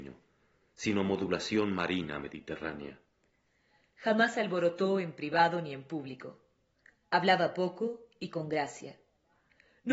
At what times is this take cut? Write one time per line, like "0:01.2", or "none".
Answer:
none